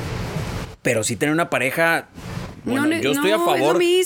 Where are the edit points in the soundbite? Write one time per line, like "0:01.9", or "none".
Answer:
none